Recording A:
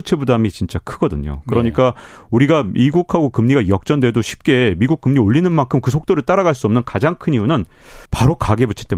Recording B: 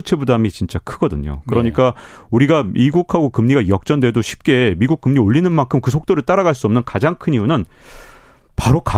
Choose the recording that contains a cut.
A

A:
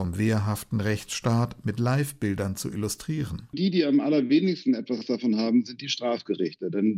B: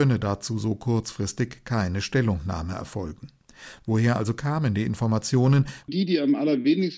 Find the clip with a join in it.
B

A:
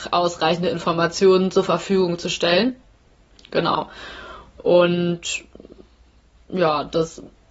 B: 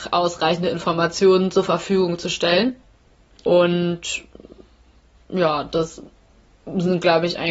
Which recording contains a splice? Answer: B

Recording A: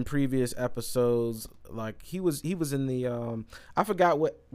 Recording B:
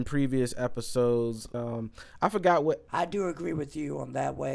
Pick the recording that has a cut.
B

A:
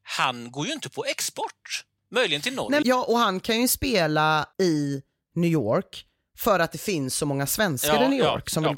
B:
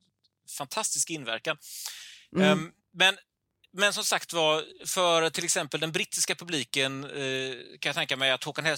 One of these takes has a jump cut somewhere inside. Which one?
A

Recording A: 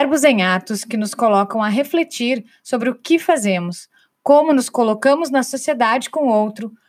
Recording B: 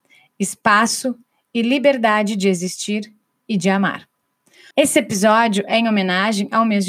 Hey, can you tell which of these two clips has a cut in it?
B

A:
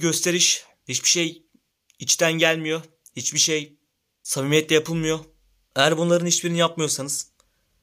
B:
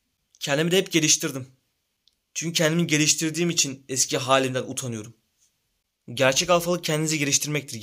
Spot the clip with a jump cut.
A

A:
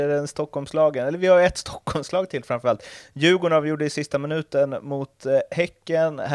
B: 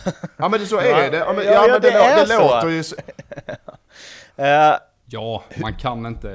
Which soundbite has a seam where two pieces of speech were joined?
B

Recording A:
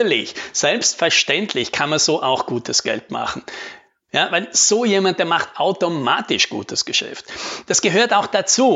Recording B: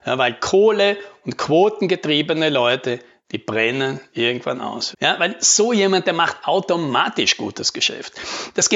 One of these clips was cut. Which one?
B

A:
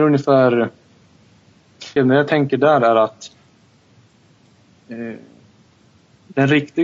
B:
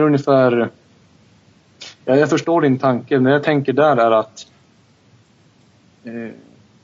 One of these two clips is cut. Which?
A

